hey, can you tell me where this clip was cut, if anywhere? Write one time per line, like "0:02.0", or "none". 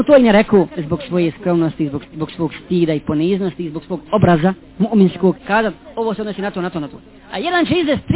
0:02.0
0:05.3